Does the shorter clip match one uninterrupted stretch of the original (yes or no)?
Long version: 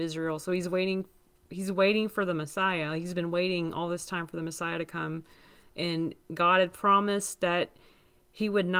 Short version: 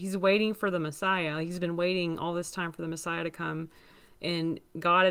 yes